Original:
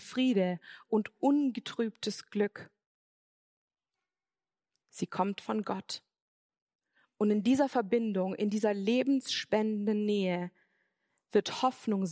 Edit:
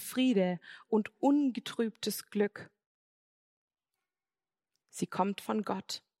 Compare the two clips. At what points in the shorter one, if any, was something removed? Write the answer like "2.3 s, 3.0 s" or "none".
none